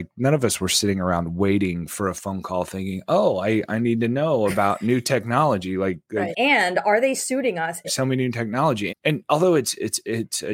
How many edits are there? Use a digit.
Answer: 3